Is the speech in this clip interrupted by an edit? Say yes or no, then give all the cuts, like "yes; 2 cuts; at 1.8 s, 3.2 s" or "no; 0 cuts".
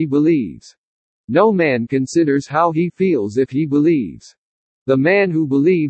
no; 0 cuts